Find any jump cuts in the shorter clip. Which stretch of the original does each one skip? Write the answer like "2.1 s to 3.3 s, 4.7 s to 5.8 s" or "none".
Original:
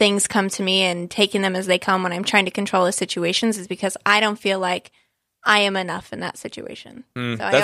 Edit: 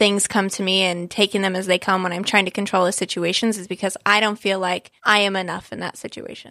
5.0 s to 5.4 s